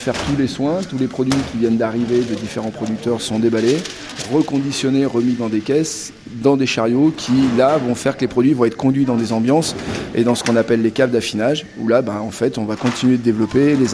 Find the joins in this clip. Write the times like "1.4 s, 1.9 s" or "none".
none